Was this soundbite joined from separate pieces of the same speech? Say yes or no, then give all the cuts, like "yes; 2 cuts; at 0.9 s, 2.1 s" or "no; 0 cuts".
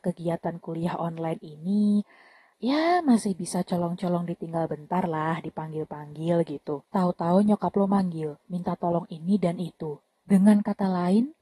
yes; 3 cuts; at 2.5 s, 6.9 s, 10.2 s